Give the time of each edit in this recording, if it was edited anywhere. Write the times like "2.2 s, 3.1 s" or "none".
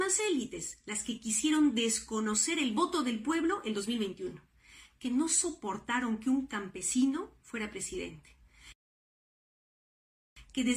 none